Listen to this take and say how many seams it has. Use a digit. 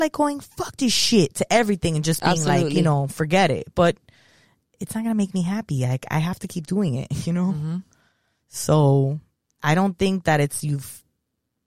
1